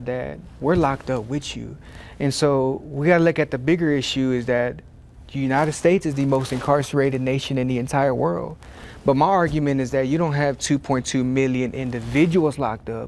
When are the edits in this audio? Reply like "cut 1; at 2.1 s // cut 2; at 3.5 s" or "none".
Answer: none